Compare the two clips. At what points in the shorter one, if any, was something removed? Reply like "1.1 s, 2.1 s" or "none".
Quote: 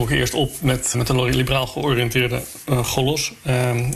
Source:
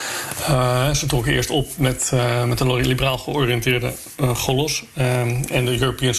0.9 s